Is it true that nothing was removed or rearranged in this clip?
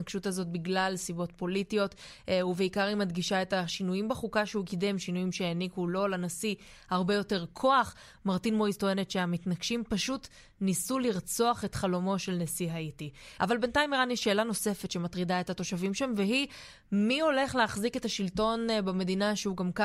no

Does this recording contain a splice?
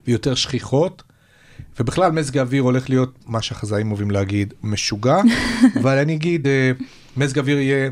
no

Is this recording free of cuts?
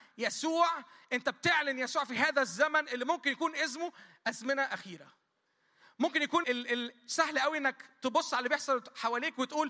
no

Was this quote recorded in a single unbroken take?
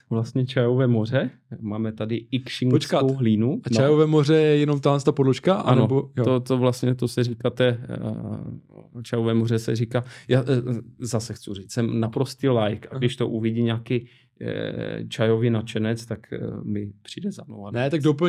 yes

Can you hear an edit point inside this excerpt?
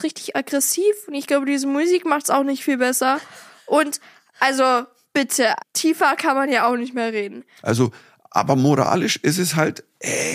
yes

